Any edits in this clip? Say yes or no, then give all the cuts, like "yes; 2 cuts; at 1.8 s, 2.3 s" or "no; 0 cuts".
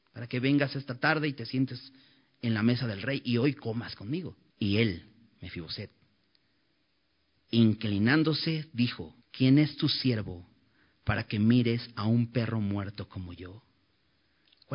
yes; 2 cuts; at 4.5 s, 9.2 s